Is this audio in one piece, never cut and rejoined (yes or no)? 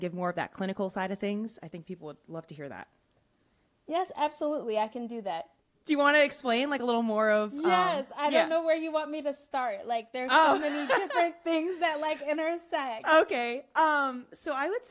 yes